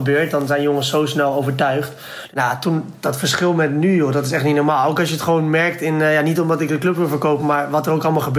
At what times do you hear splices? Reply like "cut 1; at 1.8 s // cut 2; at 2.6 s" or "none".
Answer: cut 1; at 2.3 s